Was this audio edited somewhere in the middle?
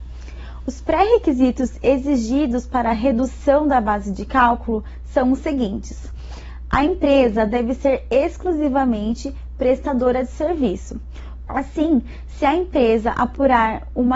yes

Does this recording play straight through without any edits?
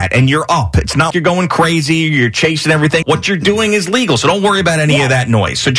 no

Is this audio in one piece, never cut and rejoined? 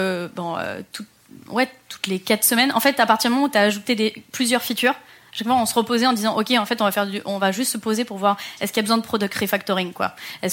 yes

